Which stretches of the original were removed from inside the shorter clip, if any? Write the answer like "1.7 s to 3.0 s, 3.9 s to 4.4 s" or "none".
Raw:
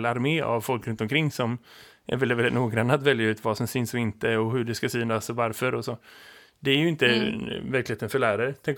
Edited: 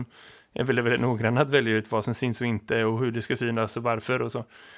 none